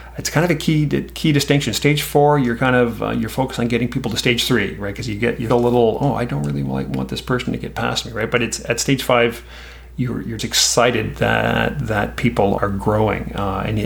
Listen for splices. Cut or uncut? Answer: cut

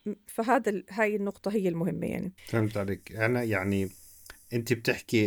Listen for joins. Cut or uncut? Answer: cut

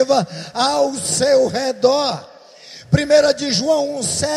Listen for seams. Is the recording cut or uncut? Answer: uncut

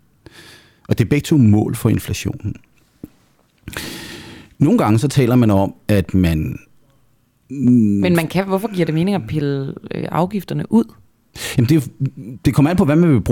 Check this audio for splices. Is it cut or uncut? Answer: uncut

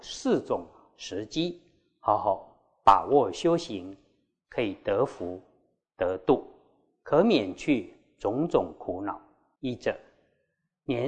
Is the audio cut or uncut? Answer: cut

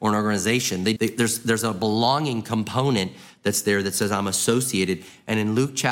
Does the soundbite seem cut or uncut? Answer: cut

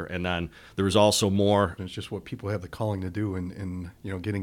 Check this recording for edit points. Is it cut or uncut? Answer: cut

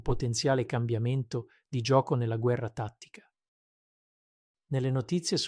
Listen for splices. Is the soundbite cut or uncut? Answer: uncut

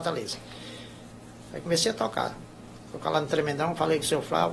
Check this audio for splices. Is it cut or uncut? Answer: uncut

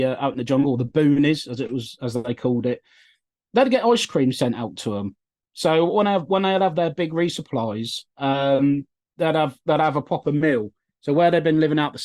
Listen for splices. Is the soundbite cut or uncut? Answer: uncut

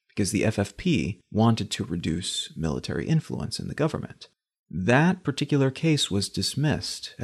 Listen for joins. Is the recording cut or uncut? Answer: cut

